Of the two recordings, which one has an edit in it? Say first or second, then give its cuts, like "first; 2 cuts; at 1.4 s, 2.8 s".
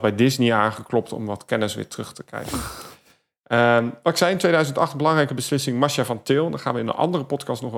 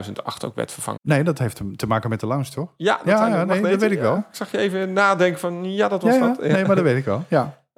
second; 2 cuts; at 1.0 s, 4.2 s